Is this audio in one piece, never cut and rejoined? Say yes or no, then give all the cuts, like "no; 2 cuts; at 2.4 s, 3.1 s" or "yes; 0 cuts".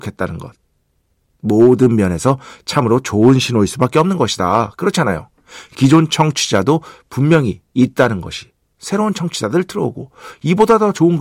no; 1 cut; at 8.7 s